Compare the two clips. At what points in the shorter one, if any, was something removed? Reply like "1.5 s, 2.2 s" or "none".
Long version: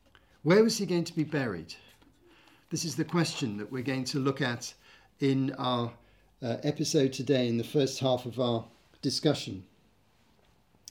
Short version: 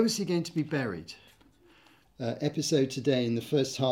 2.0 s